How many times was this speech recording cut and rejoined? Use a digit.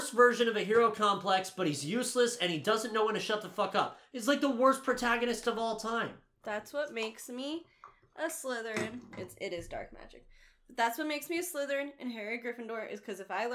0